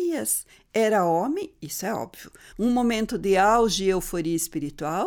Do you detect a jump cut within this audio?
yes; 1 cut; at 2.5 s

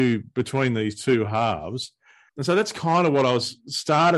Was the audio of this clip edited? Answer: yes; 1 cut; at 2.3 s

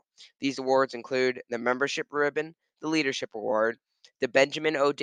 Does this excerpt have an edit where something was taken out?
no; 0 cuts

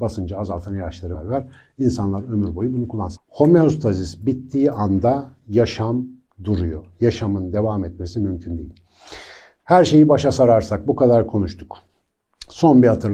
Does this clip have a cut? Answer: yes; 2 cuts; at 1.1 s, 3.2 s

